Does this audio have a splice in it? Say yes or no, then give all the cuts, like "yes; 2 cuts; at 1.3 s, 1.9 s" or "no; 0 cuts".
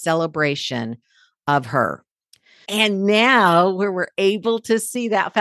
yes; 1 cut; at 2.6 s